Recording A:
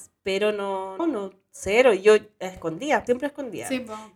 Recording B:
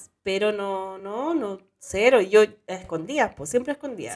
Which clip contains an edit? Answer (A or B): A